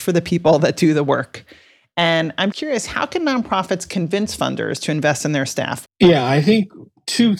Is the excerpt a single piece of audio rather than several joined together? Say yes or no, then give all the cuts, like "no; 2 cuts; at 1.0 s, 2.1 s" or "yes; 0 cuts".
no; 2 cuts; at 2.5 s, 5.9 s